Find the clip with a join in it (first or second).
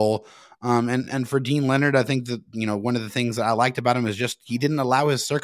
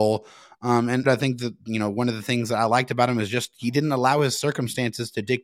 second